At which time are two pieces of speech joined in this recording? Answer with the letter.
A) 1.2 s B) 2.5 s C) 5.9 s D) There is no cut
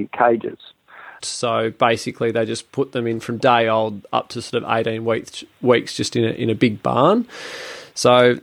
A